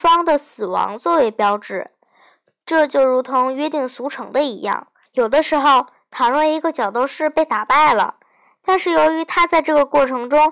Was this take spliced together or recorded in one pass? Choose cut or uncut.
cut